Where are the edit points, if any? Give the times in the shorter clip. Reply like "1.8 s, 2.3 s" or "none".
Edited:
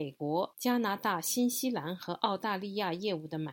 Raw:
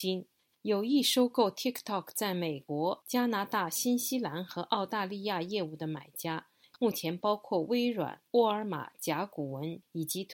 none